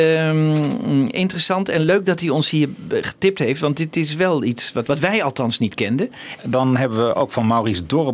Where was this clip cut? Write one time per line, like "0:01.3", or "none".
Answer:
0:04.8
0:06.4